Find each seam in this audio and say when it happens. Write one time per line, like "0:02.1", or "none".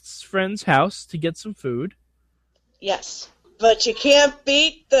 0:03.4